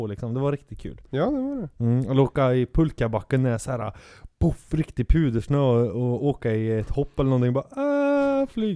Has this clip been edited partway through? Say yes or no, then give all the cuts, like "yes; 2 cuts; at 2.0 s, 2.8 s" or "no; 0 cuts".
no; 0 cuts